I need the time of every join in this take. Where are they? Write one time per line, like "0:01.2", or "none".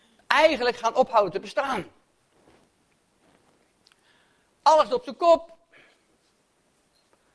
none